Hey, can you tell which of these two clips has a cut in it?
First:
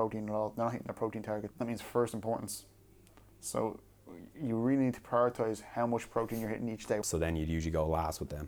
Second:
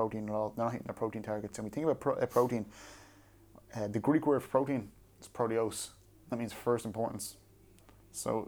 first; 2 cuts; at 1.5 s, 7.0 s

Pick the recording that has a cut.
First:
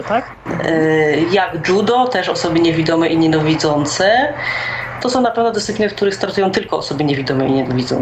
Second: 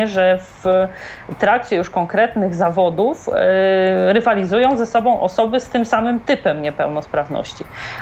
first; 1 cut; at 5.0 s

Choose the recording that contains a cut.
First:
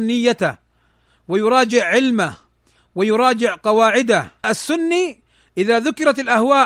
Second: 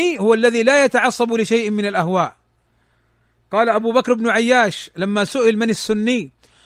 first; 1 cut; at 4.4 s

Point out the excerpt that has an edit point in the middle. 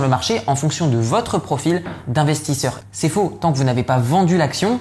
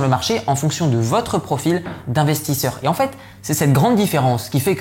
first; 1 cut; at 2.8 s

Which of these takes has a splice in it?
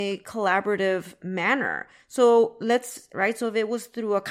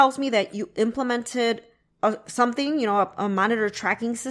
first; 1 cut; at 3.1 s

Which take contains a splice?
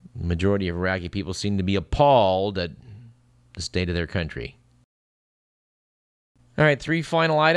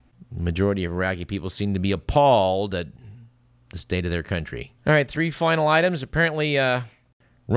second; 1 cut; at 4.8 s

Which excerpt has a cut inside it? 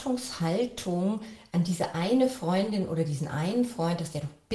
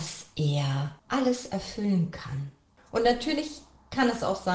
second; 2 cuts; at 1.0 s, 2.8 s

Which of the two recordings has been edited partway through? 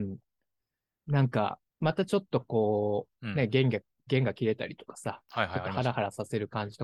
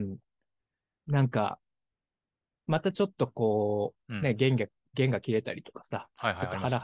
first; 1 cut; at 1.7 s

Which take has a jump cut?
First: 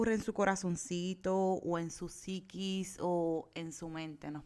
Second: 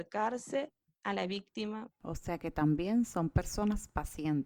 second; 1 cut; at 1.9 s

